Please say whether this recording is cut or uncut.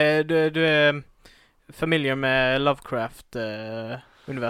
uncut